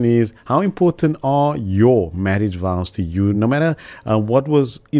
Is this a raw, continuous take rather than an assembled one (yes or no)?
yes